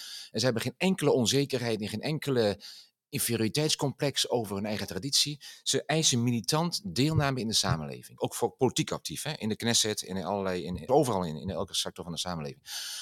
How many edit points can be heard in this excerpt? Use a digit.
2